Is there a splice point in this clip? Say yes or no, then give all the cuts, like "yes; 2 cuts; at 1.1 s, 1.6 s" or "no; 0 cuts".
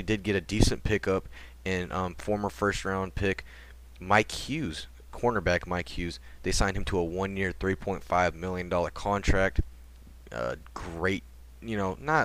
no; 0 cuts